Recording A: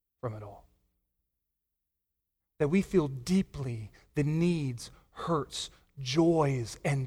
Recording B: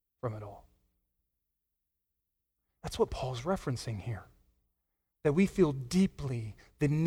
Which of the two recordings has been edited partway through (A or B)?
A